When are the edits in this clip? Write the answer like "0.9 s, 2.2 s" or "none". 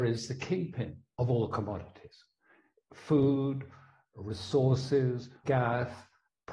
5.4 s